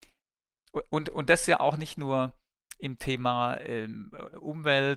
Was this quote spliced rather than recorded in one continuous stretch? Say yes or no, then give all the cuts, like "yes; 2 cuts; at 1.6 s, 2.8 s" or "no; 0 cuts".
no; 0 cuts